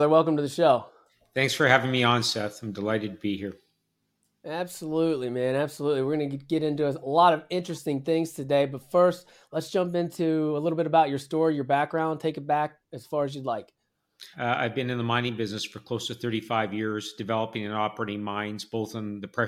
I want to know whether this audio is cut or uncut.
cut